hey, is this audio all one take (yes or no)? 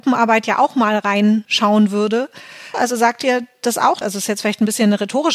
no